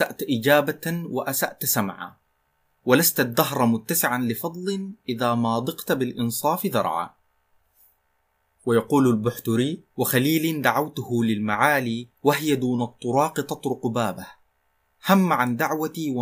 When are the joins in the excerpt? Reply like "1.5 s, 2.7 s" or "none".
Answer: 9.9 s, 12.2 s